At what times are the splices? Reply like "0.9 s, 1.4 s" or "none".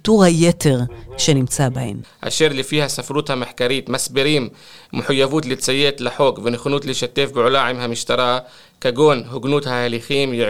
2.0 s